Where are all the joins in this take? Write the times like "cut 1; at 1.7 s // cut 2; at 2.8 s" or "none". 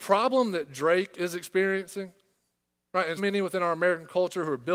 cut 1; at 3.2 s

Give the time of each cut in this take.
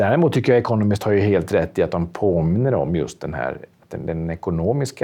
none

